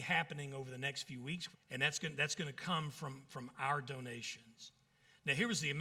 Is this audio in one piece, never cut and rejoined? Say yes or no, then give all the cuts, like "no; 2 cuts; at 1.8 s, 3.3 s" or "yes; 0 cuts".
no; 1 cut; at 1.5 s